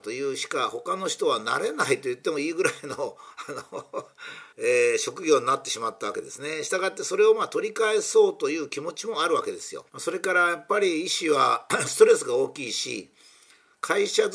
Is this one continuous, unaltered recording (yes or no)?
no